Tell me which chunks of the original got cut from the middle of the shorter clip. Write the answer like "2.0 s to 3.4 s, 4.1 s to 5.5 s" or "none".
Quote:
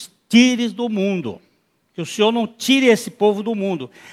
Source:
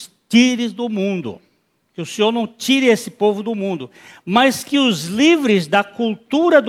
none

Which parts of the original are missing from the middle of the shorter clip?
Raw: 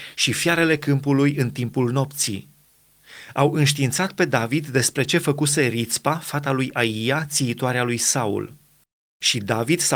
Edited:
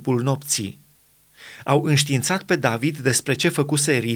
none

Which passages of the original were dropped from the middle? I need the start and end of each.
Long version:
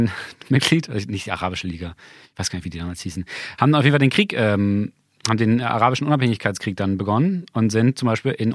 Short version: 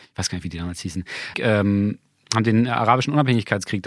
3.5 s to 4.3 s

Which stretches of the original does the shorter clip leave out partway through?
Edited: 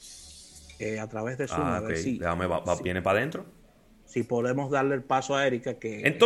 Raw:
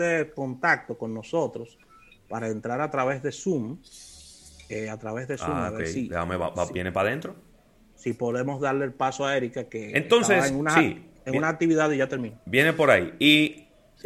none

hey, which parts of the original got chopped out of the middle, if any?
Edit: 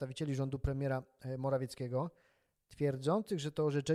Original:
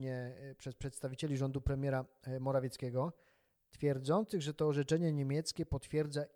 none

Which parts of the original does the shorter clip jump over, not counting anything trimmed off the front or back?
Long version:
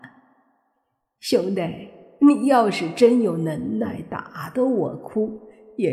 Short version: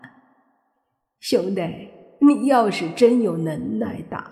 none

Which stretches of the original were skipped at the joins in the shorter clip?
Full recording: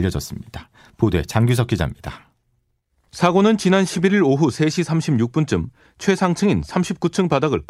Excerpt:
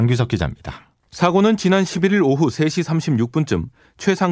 2.4 s to 3.0 s

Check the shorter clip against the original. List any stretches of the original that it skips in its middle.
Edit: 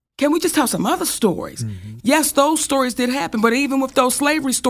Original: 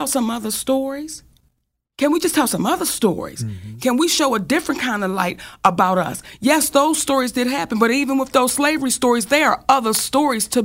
3.8 s to 6.4 s

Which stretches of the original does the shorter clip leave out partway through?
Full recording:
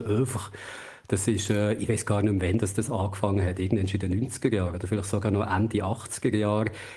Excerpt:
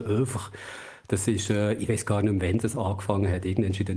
2.6 s to 2.7 s

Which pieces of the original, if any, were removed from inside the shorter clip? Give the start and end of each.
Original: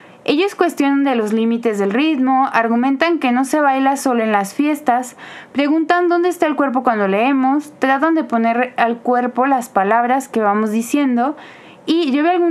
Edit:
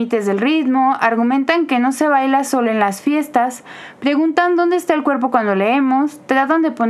none

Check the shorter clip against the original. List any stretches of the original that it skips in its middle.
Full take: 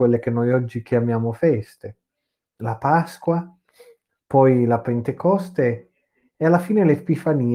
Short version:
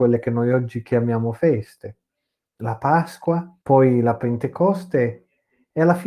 3.6 s to 4.2 s

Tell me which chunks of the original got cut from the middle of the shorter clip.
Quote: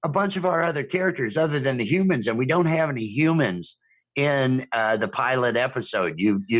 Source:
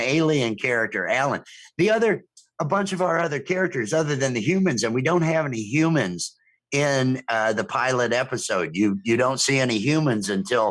none

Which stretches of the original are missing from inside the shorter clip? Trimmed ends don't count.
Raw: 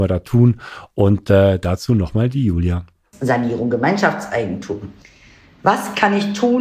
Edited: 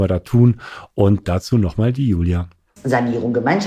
1.2 s to 1.6 s

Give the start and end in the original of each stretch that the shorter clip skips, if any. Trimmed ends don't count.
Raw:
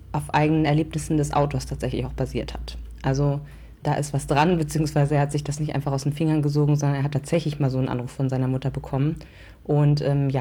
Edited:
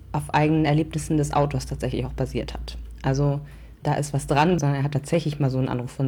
4.6 s to 6.8 s

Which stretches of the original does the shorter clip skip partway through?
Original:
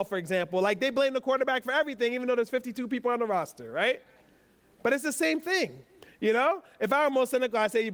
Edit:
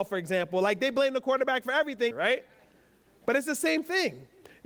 2.1 s to 3.7 s

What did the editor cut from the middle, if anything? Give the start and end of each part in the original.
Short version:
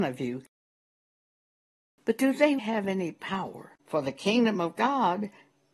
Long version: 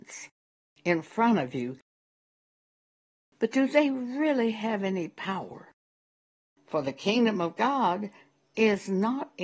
3.9 s to 4.5 s, 5.8 s to 6.6 s

